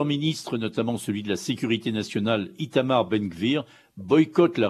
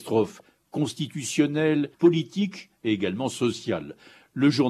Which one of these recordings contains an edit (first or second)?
second